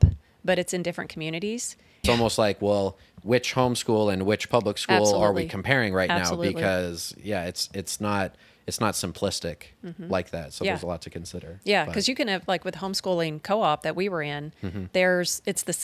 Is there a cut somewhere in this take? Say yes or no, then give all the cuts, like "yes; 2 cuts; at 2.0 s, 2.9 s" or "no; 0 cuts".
yes; 1 cut; at 2.0 s